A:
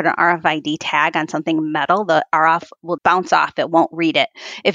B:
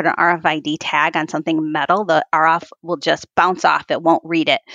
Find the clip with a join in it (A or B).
A